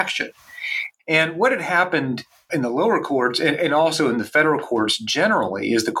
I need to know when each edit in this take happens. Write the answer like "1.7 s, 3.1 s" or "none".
1.0 s, 2.5 s